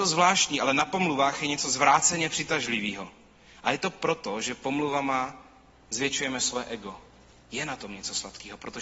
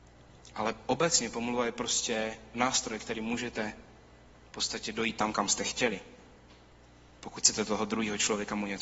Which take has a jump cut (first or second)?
first